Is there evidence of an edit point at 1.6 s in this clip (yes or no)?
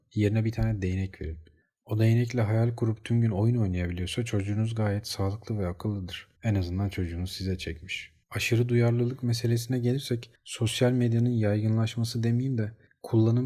no